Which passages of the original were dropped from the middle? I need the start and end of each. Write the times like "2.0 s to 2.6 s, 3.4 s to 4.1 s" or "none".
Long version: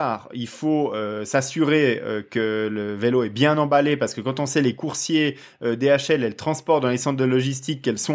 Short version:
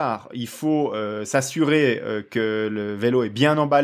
none